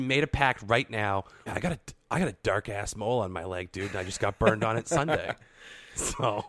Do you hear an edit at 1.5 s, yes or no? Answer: yes